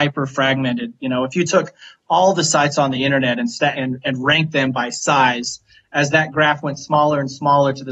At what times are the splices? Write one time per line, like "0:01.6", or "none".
0:03.7